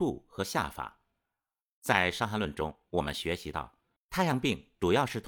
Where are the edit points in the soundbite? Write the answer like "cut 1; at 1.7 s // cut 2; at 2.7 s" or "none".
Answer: none